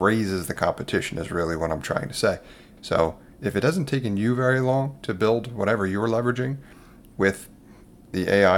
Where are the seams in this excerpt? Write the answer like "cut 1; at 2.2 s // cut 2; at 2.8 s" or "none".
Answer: cut 1; at 2.8 s